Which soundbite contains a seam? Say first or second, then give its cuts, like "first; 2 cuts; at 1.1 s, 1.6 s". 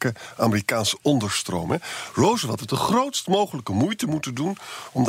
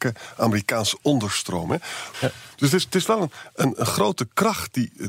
second; 1 cut; at 2.1 s